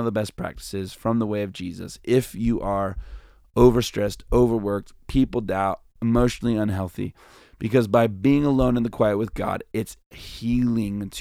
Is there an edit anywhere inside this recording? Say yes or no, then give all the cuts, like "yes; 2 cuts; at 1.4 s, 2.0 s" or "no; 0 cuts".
no; 0 cuts